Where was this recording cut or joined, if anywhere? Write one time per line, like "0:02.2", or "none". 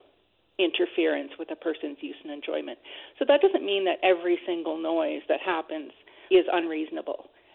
0:06.3